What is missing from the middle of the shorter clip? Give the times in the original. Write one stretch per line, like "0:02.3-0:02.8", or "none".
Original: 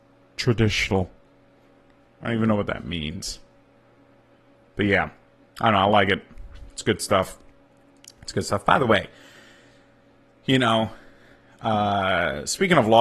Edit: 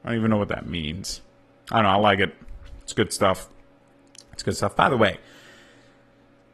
0:03.7-0:05.5

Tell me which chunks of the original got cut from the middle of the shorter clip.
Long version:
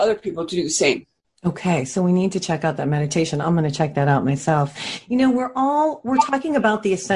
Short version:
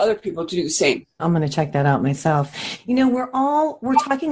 0:01.2-0:03.4

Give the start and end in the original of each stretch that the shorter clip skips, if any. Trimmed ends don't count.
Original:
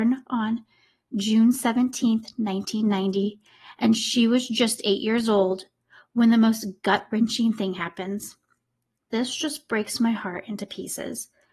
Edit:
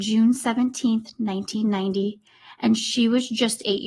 none

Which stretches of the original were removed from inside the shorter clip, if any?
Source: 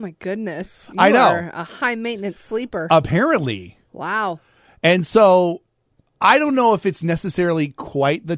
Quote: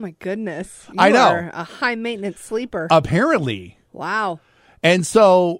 none

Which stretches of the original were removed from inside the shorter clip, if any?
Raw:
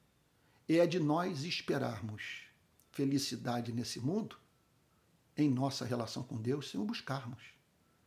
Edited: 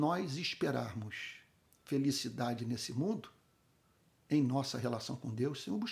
none

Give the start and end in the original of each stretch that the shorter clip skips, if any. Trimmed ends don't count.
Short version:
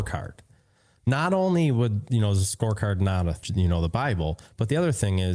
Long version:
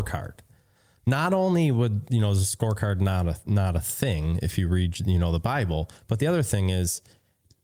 0:03.4-0:04.9

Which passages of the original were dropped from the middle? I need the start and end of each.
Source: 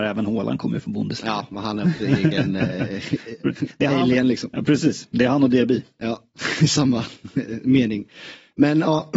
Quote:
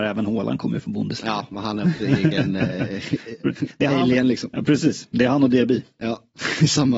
none

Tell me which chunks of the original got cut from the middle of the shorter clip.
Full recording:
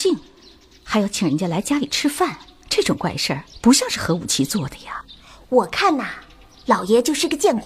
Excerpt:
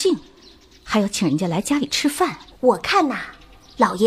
0:02.5-0:05.4

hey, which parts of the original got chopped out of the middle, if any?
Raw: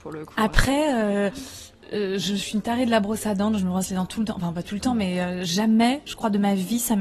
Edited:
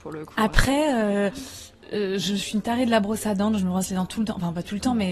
none

